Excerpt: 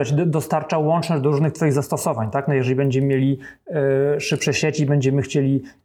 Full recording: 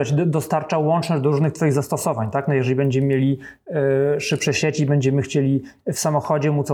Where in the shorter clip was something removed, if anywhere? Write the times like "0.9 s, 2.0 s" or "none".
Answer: none